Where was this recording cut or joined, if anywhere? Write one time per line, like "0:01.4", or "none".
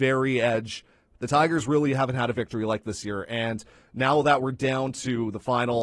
0:01.1
0:02.8